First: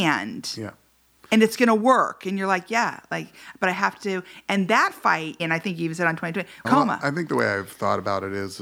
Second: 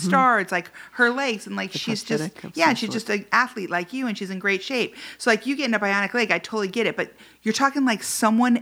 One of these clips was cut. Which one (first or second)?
first